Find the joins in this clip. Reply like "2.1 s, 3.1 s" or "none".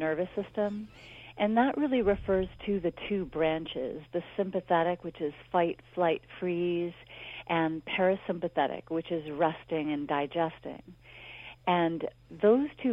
none